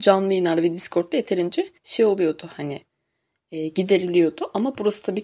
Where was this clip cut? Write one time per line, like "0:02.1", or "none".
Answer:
0:01.8